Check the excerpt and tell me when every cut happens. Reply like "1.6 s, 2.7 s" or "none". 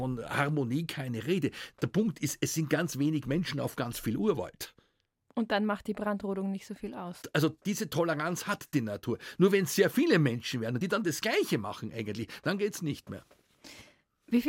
none